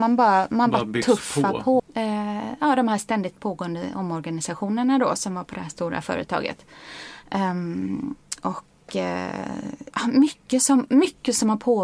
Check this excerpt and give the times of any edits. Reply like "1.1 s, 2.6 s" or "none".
1.8 s